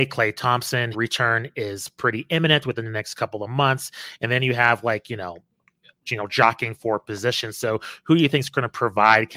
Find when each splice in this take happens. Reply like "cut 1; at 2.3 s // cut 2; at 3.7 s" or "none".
cut 1; at 0.9 s // cut 2; at 6.1 s